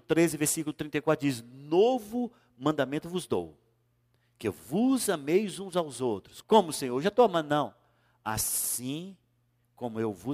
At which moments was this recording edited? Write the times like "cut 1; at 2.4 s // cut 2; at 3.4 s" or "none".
cut 1; at 6.4 s